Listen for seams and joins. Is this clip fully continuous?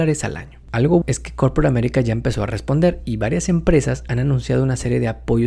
no; 1 cut; at 1.0 s

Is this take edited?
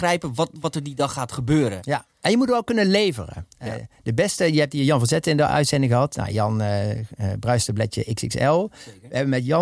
no; 0 cuts

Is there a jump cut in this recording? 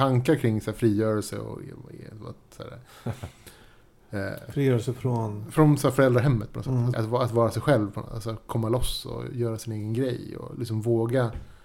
yes; 1 cut; at 6.9 s

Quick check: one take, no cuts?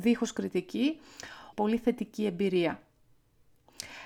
no; 1 cut; at 1.5 s

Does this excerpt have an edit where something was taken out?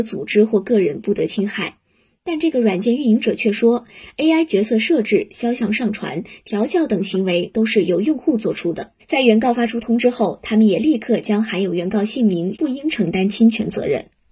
yes; 2 cuts; at 9.0 s, 12.5 s

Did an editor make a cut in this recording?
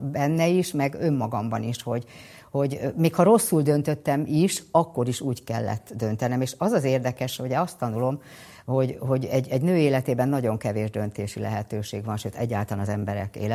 no; 0 cuts

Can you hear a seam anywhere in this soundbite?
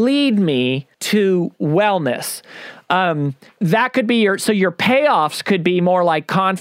yes; 2 cuts; at 0.9 s, 3.5 s

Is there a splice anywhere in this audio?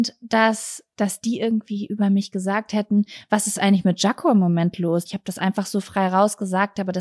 yes; 1 cut; at 5.1 s

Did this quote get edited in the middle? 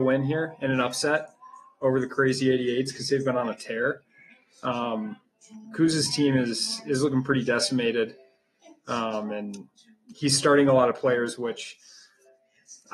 no; 0 cuts

